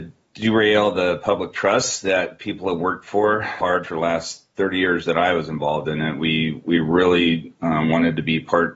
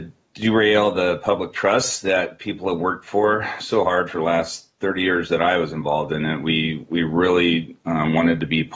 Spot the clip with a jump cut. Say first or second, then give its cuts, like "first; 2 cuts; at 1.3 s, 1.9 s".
first; 1 cut; at 3.6 s